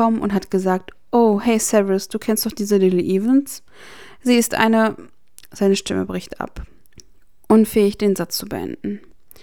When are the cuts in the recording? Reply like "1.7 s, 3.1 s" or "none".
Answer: none